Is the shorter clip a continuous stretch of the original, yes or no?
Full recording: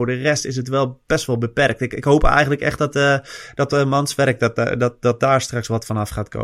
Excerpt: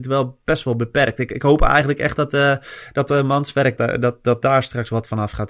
no